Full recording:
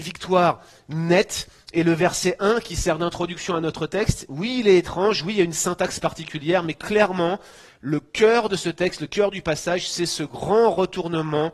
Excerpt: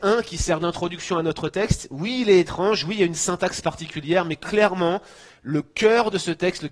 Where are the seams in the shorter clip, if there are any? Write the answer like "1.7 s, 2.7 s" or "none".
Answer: none

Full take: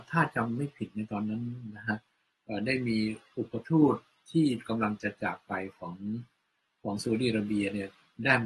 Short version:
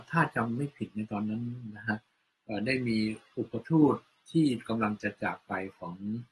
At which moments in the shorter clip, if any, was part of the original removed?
none

